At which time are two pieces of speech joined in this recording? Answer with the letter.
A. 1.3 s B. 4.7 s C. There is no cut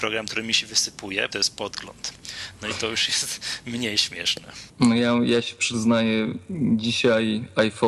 A